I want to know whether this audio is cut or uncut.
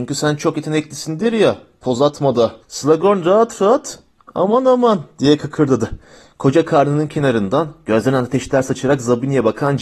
cut